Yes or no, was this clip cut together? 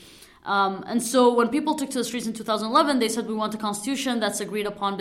no